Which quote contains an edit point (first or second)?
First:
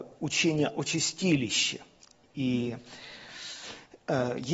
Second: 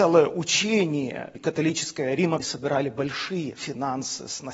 second